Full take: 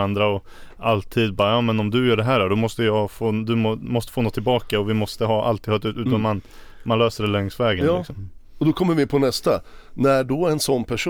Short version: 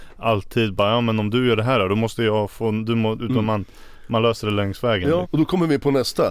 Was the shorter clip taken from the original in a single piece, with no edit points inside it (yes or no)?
no